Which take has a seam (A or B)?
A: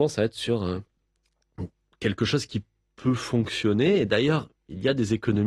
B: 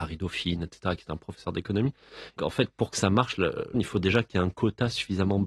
B